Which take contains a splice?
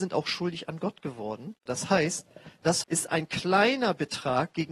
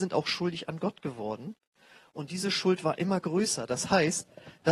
first; 2 cuts; at 1.7 s, 2.8 s

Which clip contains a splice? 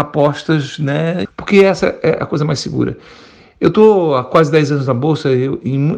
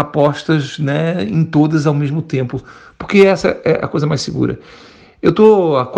first; 1 cut; at 1.3 s

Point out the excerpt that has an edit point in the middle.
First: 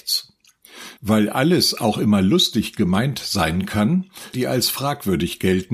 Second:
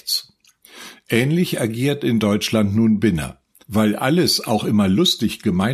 first; 2 cuts; at 1.0 s, 4.3 s

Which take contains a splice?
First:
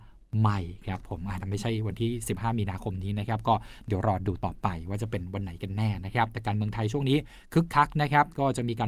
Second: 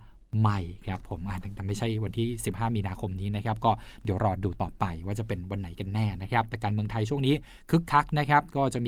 first; 1 cut; at 1.4 s

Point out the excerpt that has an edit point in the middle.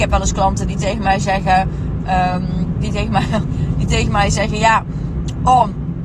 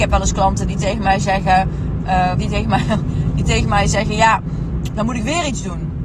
second; 2 cuts; at 2.3 s, 4.9 s

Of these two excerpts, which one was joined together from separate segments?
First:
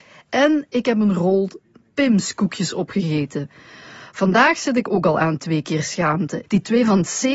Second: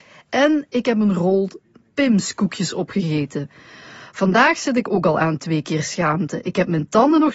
first; 1 cut; at 6.4 s

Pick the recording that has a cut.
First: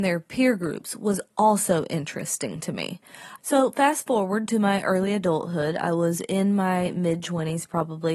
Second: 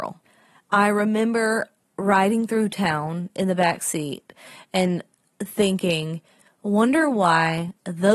first; 1 cut; at 3.4 s

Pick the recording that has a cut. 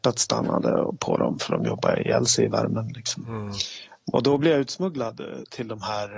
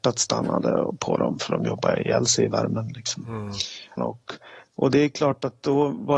second; 1 cut; at 4.0 s

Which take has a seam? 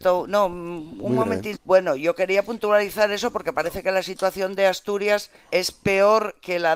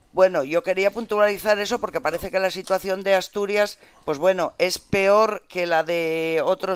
first; 2 cuts; at 1.5 s, 5.5 s

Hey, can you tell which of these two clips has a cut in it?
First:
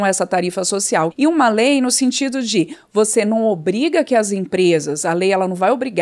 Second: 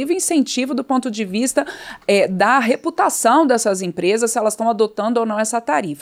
first; 1 cut; at 1.1 s

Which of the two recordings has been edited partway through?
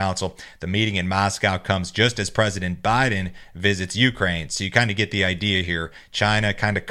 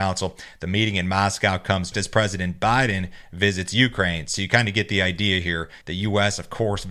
second; 2 cuts; at 1.9 s, 5.8 s

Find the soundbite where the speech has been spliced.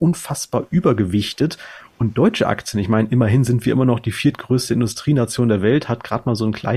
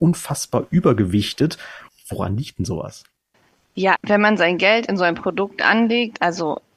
second; 2 cuts; at 1.9 s, 4.0 s

